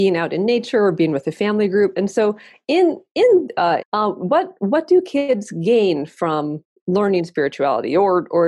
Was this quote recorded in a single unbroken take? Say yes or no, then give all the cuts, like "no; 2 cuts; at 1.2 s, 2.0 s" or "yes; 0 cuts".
no; 1 cut; at 3.8 s